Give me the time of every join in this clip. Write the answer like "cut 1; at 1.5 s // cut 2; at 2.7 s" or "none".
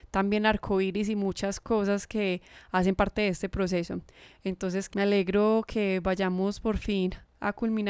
cut 1; at 4.9 s